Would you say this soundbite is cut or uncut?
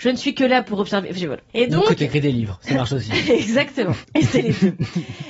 cut